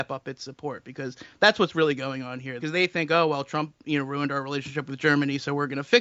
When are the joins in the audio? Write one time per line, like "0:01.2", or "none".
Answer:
0:02.6